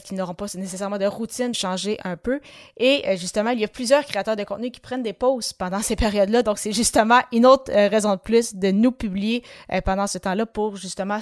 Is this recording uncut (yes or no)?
no